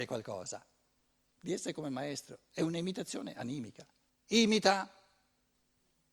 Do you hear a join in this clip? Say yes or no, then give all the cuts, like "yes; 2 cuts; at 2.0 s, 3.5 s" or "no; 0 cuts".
yes; 2 cuts; at 1.2 s, 4.1 s